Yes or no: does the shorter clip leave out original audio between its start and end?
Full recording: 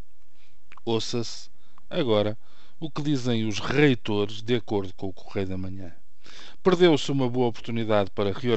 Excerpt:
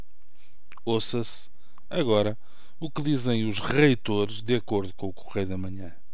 no